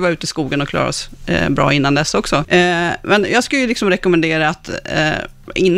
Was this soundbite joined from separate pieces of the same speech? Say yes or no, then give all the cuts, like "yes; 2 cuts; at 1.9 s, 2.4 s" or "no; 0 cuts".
yes; 1 cut; at 2.4 s